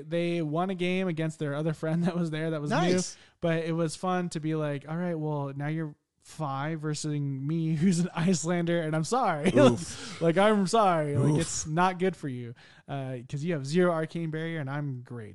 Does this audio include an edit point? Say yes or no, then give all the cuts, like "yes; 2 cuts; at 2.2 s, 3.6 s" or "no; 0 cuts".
no; 0 cuts